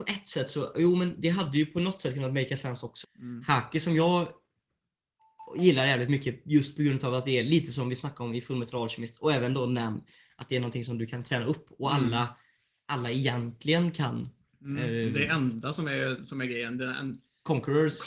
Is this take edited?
yes; 1 cut; at 3.0 s

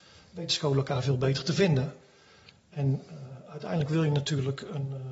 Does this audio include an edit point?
no; 0 cuts

